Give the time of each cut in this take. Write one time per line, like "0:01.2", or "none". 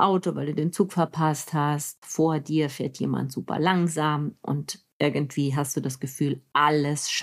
none